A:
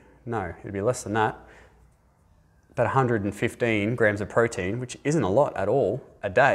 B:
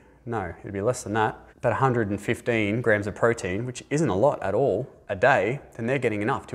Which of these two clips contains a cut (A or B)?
B